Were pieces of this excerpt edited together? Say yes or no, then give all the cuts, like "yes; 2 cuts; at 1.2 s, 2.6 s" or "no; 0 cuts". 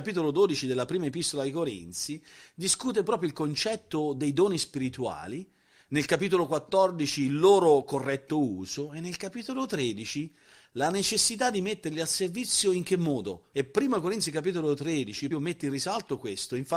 yes; 2 cuts; at 13.5 s, 15.3 s